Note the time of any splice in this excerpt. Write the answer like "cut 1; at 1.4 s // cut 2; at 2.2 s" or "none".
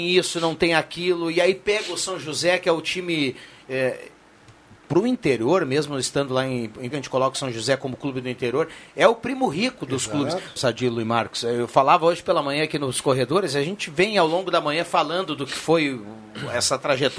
cut 1; at 6.9 s // cut 2; at 10.6 s